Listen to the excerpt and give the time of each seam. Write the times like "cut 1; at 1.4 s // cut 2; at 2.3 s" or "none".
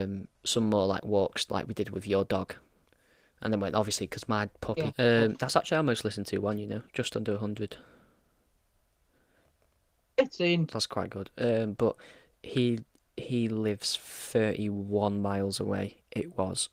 cut 1; at 4.9 s